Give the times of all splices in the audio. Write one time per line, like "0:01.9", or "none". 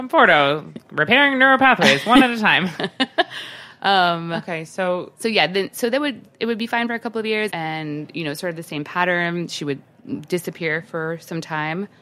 0:07.5